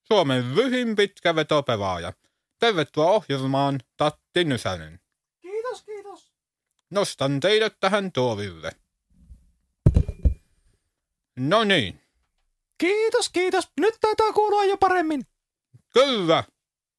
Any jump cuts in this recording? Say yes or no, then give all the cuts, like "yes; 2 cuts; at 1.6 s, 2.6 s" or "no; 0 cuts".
yes; 1 cut; at 6.8 s